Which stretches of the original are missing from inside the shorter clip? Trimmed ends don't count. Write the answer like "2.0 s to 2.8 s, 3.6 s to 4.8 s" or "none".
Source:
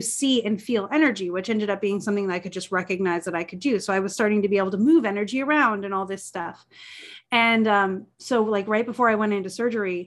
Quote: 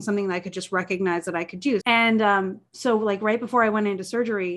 3.8 s to 7.3 s